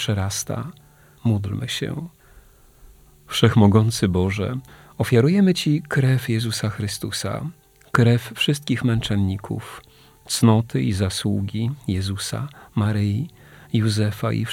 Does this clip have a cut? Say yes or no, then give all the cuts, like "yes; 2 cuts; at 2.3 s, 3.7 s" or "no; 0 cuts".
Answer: yes; 1 cut; at 1.1 s